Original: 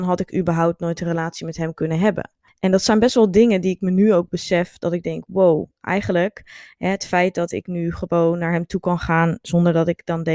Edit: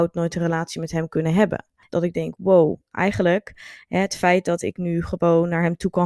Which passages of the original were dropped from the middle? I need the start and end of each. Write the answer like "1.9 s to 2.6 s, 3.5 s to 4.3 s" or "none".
2.5 s to 4.8 s